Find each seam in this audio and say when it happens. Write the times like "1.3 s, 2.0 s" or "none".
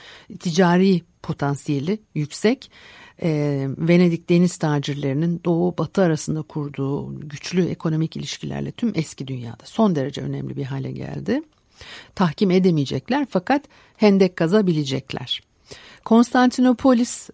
12.0 s

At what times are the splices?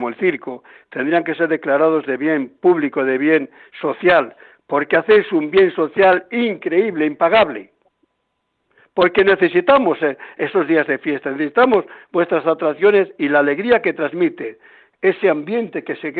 none

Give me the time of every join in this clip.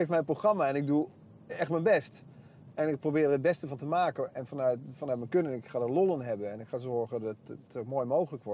none

